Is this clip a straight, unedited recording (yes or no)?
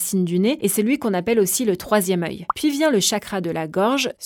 yes